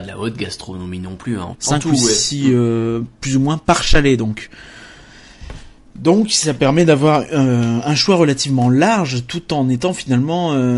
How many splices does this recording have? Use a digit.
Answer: 1